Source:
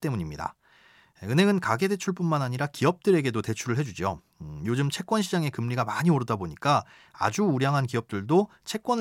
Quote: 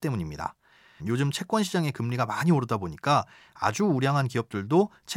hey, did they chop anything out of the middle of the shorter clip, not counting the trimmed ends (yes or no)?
yes